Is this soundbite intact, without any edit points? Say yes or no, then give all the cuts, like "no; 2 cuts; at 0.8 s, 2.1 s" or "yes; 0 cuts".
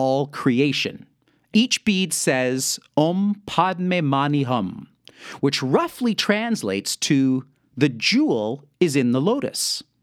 no; 1 cut; at 1.5 s